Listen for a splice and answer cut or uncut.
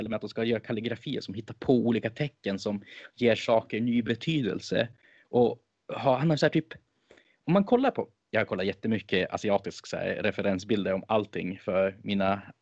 uncut